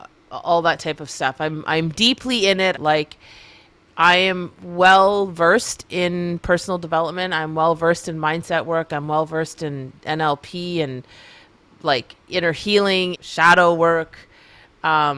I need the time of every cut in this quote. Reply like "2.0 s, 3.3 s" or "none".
2.7 s, 13.1 s